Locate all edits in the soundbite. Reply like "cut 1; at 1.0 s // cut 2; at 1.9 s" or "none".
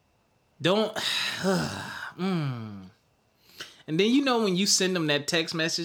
none